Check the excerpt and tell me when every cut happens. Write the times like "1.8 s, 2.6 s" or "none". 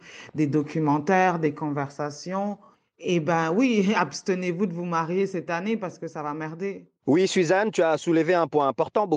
none